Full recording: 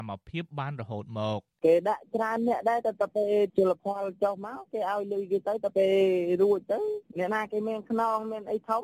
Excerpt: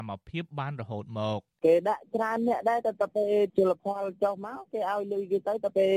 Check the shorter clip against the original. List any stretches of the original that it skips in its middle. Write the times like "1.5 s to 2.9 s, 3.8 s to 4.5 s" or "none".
none